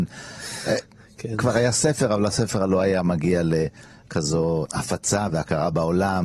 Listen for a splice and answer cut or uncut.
uncut